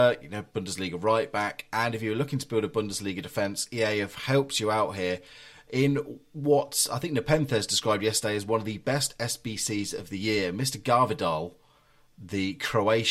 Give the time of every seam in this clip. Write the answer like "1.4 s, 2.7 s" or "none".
none